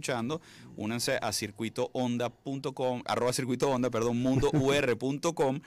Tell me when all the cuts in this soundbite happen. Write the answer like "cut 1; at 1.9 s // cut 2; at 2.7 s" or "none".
cut 1; at 3.0 s